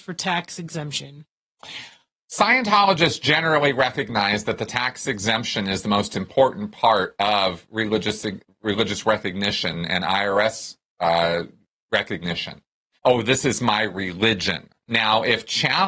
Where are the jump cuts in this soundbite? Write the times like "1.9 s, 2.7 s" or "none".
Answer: 12.9 s

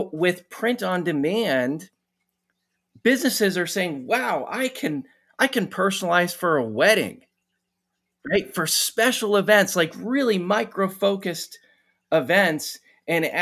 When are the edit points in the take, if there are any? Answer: none

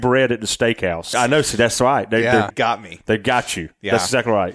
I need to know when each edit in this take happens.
1.1 s, 2.5 s

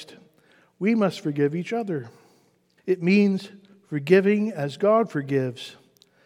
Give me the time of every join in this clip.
2.8 s

